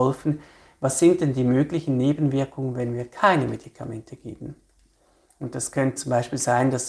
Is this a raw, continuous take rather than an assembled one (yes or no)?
no